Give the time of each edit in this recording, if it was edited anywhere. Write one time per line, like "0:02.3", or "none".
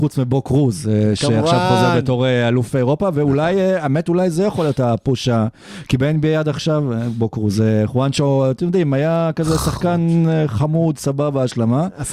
none